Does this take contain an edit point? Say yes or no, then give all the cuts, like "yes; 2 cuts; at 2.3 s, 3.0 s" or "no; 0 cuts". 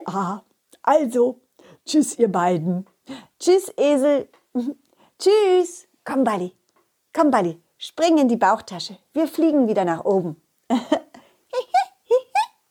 no; 0 cuts